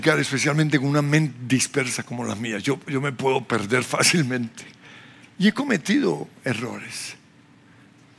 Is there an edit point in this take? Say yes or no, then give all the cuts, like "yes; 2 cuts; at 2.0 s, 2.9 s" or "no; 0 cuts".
no; 0 cuts